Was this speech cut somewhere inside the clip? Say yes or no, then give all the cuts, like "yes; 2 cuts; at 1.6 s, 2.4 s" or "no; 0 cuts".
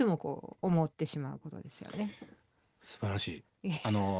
no; 0 cuts